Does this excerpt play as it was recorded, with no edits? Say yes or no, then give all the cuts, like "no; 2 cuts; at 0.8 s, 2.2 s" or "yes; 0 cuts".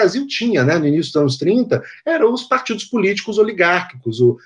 yes; 0 cuts